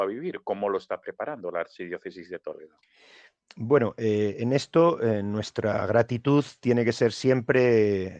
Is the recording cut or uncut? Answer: uncut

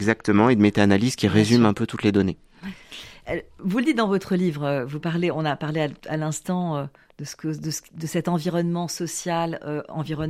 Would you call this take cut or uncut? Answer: uncut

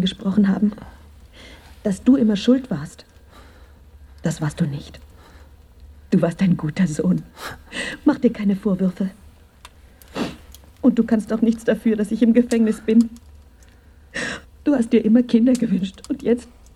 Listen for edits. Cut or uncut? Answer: cut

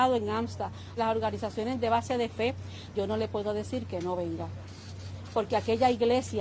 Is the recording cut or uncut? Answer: cut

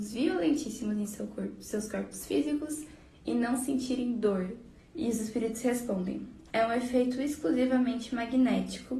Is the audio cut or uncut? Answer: cut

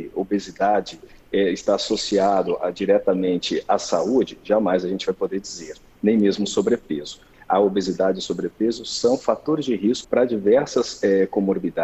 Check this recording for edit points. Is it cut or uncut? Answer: cut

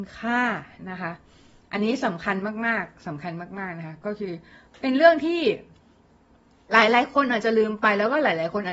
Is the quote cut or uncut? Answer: uncut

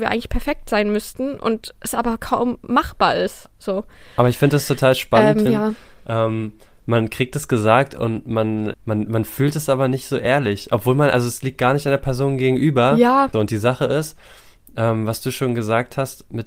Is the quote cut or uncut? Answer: cut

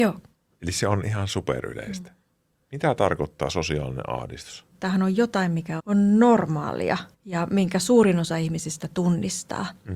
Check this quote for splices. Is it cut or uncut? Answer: cut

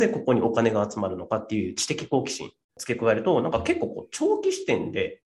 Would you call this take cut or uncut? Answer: cut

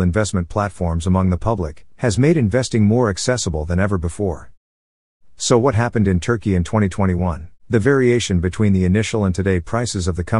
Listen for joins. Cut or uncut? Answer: cut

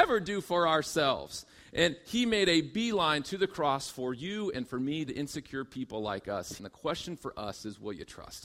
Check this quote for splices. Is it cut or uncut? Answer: cut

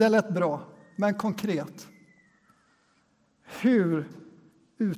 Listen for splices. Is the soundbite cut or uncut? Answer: uncut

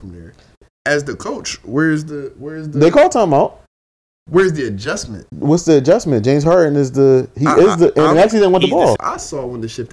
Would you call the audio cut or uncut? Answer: cut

